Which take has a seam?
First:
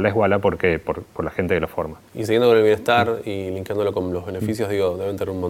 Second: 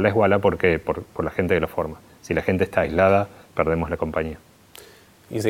first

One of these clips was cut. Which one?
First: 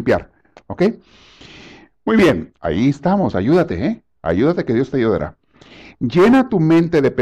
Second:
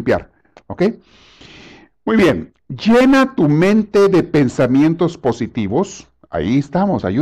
first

